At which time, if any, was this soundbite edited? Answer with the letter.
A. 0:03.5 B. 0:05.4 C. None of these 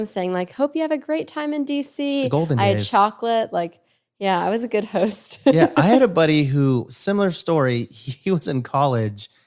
C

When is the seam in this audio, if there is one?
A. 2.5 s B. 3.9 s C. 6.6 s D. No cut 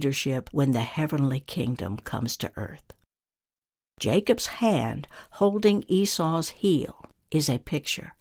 D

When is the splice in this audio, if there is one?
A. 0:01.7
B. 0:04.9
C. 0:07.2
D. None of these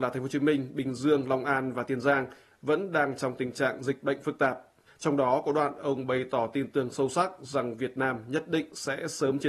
B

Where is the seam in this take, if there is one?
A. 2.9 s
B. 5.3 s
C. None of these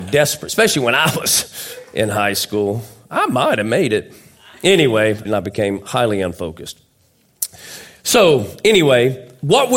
B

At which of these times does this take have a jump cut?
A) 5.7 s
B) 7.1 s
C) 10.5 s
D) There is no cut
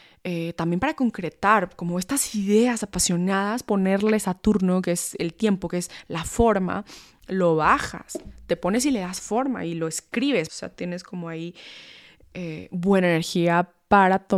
C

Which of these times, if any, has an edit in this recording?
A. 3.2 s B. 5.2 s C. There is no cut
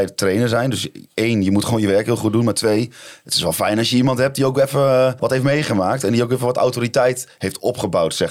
B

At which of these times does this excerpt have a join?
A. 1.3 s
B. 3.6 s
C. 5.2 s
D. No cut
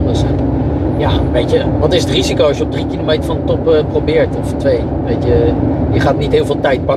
C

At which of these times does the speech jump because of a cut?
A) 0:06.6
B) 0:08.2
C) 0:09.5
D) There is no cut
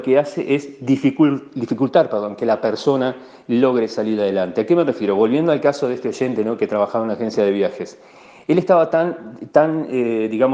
D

